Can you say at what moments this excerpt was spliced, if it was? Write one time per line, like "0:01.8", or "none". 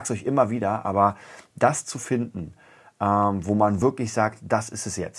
none

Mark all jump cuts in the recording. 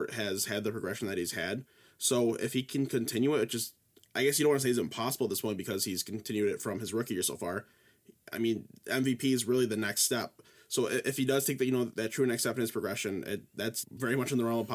0:11.9
0:13.8

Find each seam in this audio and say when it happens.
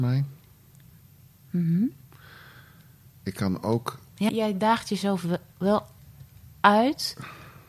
0:04.3

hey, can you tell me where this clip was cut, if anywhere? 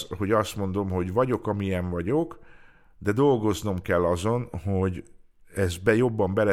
none

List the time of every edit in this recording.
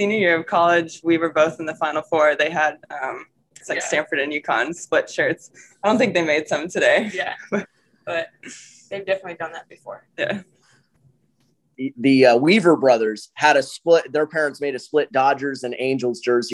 0:03.6

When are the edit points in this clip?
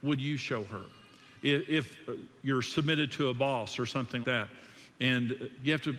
0:04.2

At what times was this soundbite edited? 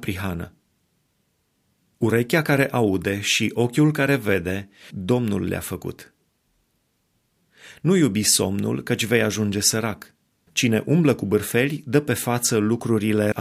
0:04.9
0:10.5

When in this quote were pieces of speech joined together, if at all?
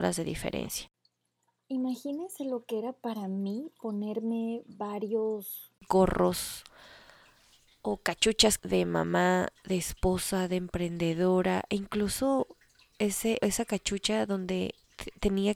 0:08.6
0:13.4

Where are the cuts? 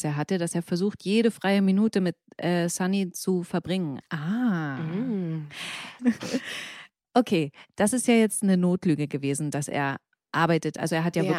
0:04.0
0:06.0

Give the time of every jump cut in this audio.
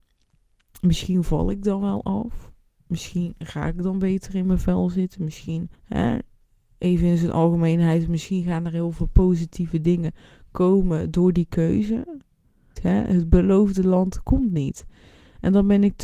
0:05.7
0:12.8

